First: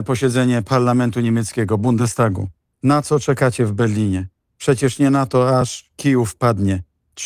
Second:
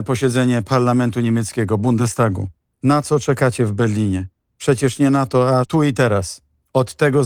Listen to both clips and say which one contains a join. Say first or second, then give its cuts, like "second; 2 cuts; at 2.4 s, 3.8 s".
second; 1 cut; at 5.6 s